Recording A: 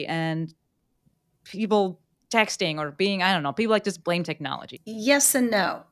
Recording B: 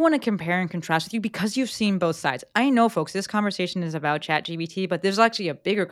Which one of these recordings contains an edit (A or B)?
A